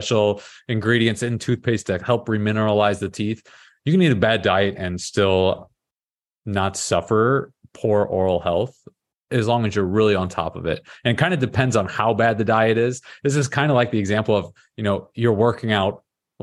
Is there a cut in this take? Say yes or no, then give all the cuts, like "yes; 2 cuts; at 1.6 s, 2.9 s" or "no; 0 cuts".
no; 0 cuts